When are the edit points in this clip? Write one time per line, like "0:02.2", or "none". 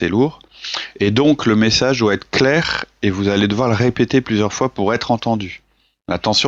none